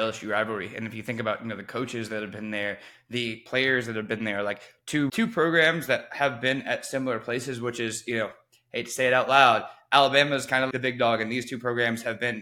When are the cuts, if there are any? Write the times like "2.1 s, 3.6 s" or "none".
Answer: 5.1 s, 10.7 s